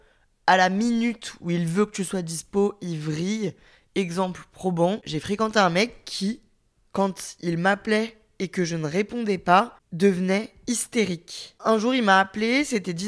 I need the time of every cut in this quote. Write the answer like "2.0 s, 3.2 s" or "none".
none